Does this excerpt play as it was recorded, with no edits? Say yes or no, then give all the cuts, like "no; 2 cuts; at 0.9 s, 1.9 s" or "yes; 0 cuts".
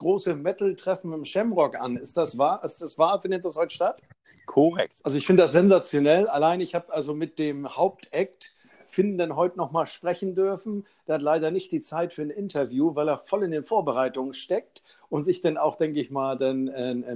no; 1 cut; at 5.0 s